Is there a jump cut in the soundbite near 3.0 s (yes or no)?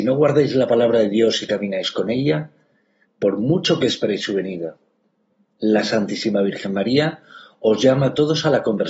yes